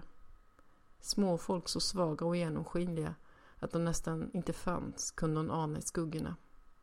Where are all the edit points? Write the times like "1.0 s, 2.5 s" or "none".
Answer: 1.0 s